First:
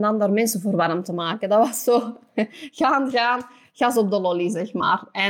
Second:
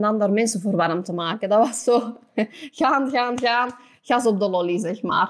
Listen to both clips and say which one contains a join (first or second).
first